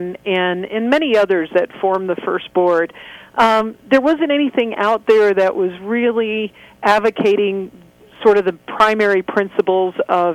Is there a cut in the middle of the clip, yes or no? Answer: no